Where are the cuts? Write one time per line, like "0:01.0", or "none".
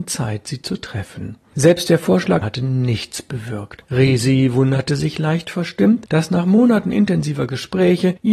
0:02.4
0:03.8